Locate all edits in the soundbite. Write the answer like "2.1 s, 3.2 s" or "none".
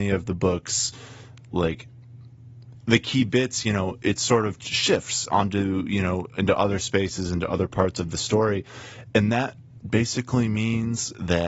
none